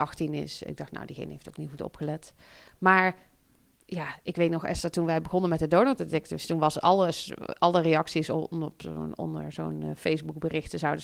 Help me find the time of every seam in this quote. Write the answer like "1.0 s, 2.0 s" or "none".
none